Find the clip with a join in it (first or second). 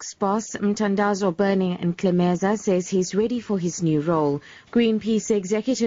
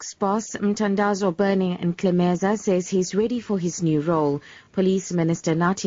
first